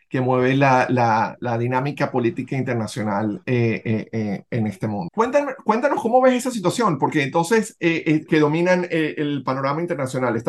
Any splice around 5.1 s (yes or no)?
yes